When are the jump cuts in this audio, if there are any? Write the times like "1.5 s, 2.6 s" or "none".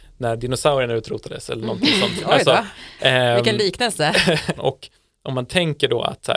4.6 s